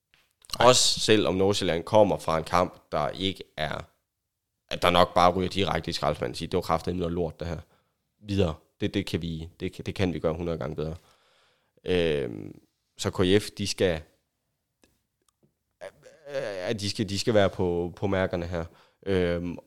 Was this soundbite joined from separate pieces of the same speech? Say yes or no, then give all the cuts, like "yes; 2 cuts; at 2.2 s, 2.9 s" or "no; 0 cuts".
no; 0 cuts